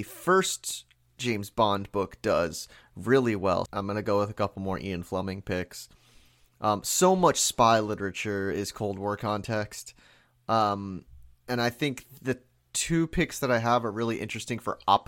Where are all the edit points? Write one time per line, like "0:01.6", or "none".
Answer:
0:03.7